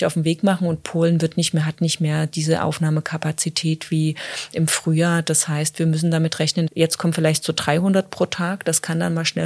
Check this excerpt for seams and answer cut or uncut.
cut